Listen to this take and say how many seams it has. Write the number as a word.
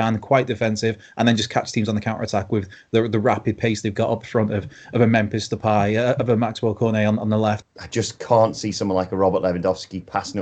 one